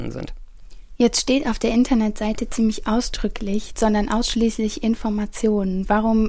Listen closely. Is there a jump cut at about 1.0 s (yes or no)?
no